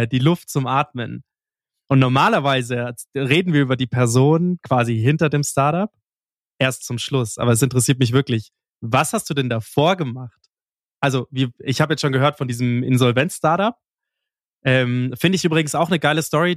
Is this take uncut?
yes; 0 cuts

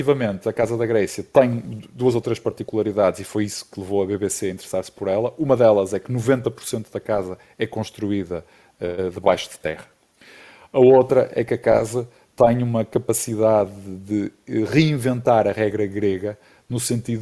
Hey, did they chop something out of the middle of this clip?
no; 0 cuts

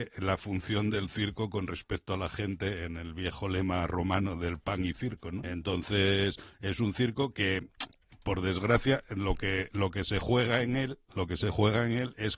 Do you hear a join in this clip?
yes; 1 cut; at 5.4 s

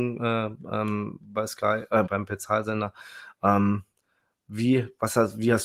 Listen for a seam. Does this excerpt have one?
yes; 1 cut; at 2.1 s

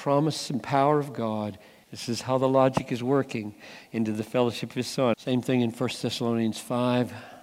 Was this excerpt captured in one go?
no; 2 cuts; at 1.8 s, 5.1 s

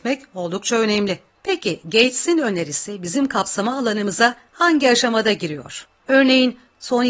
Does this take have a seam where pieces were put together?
yes; 2 cuts; at 1.3 s, 5.9 s

